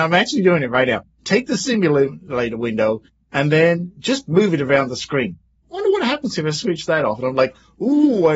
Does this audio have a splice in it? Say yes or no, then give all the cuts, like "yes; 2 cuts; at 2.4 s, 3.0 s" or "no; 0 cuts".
yes; 1 cut; at 5.6 s